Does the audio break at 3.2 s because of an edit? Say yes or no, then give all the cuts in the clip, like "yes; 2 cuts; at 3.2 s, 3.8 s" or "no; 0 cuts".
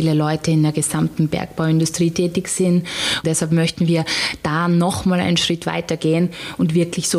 yes; 1 cut; at 3.2 s